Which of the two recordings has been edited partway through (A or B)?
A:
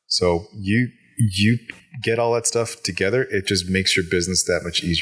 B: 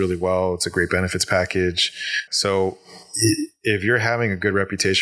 B